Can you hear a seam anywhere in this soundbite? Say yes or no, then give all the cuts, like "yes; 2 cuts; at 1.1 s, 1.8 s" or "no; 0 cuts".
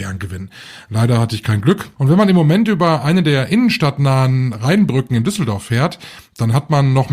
yes; 1 cut; at 2.0 s